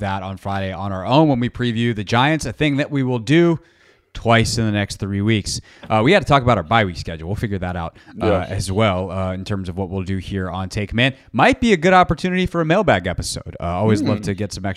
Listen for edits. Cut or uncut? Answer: uncut